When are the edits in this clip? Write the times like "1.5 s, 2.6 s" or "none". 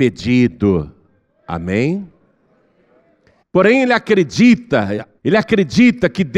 3.4 s, 5.2 s